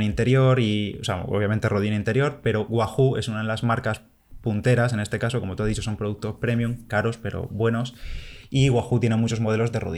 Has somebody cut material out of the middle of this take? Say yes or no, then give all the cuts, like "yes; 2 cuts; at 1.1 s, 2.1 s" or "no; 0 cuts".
no; 0 cuts